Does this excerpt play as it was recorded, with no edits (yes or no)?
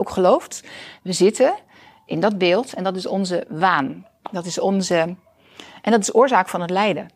yes